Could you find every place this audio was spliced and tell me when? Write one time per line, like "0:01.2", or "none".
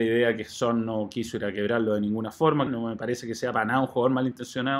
0:02.7